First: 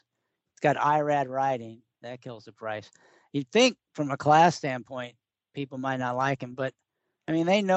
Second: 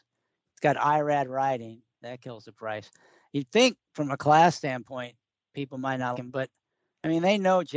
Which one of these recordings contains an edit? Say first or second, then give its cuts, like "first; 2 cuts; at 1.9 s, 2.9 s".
second; 1 cut; at 6.1 s